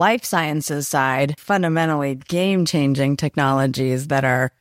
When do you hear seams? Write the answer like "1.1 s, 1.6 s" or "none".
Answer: 1.4 s